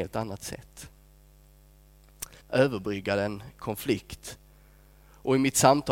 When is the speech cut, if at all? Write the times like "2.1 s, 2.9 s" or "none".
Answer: 2.4 s